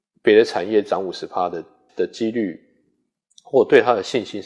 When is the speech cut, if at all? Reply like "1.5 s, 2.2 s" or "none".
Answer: 1.9 s